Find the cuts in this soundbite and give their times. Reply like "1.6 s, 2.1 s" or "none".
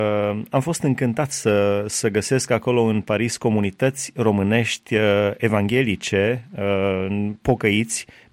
none

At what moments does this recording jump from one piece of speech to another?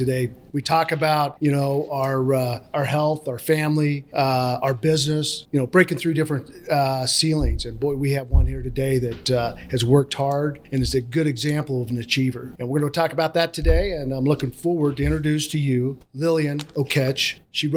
none

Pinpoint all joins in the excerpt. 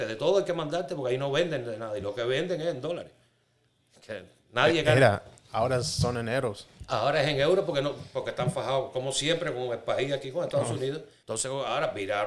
11.2 s

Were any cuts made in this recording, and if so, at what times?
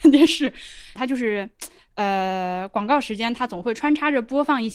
1.0 s

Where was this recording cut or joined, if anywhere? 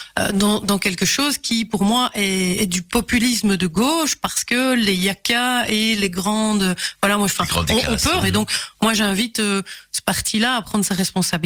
2.6 s, 8.2 s

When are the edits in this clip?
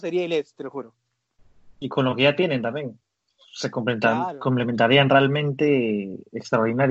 none

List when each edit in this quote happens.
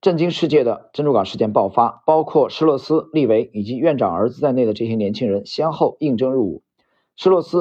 none

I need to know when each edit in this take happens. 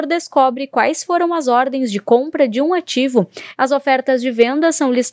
3.6 s

